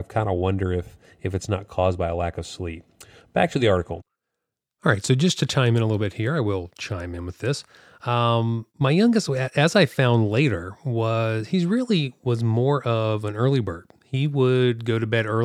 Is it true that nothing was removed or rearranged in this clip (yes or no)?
no